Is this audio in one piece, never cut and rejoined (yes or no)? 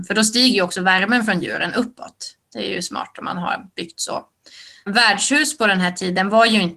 no